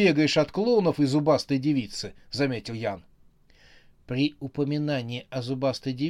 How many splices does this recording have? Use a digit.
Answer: 0